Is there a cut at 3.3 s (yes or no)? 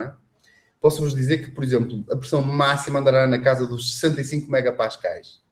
no